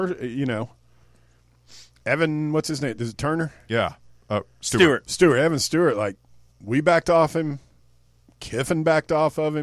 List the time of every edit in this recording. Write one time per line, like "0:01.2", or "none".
none